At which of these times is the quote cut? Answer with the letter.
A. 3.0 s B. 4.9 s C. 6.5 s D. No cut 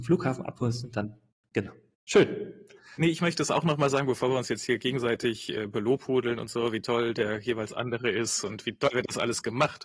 A